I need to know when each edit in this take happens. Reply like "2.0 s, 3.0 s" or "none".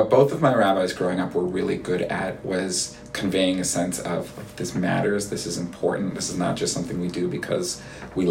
none